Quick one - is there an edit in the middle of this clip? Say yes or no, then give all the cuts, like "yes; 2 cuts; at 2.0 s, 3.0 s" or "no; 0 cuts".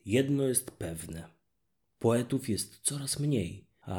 no; 0 cuts